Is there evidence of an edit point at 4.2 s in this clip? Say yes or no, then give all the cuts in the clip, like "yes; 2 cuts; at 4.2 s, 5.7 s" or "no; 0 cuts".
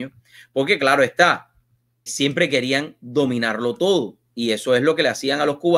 no; 1 cut; at 2.1 s